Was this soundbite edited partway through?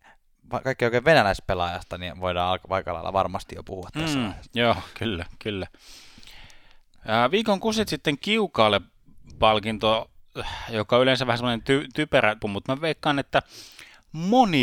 yes; 1 cut; at 12.4 s

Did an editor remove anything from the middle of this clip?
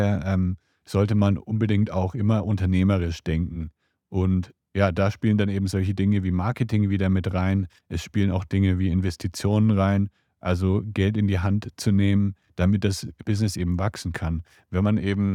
no; 0 cuts

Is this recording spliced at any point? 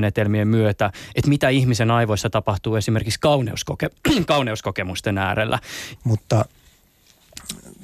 yes; 1 cut; at 6.0 s

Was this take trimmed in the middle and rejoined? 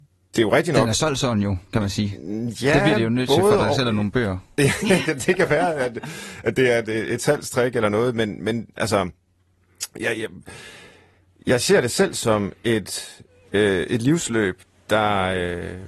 no; 0 cuts

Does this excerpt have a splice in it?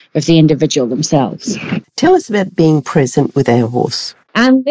yes; 1 cut; at 1.8 s

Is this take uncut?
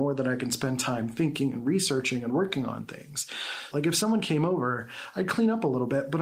no; 1 cut; at 3.7 s

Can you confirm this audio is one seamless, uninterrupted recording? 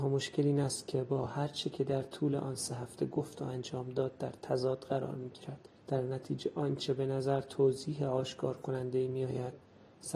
no; 1 cut; at 5.8 s

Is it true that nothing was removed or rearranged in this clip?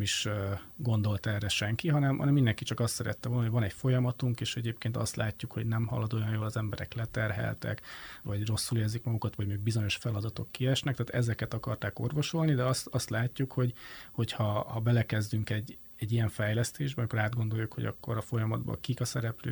yes; 0 cuts

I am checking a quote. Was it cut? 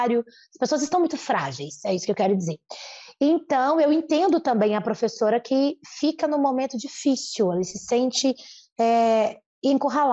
no; 0 cuts

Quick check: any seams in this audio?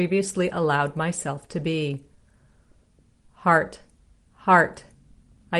yes; 1 cut; at 4.3 s

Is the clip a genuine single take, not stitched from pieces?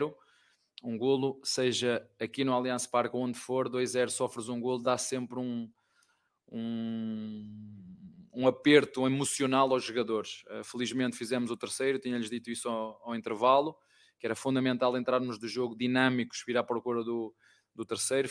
yes; 0 cuts

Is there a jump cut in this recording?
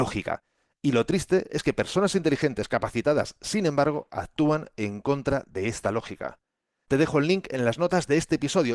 yes; 1 cut; at 6.8 s

